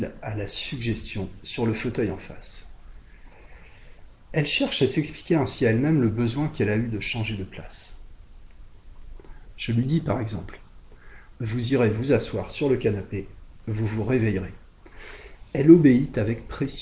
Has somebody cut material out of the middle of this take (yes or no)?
yes